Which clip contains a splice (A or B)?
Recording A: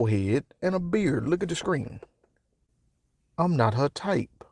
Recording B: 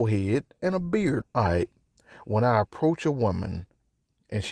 B